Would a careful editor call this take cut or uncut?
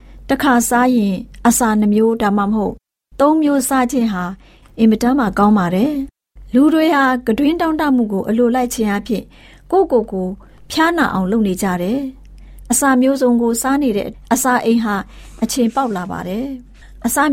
uncut